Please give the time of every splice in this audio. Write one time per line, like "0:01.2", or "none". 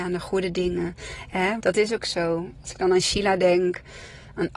0:01.6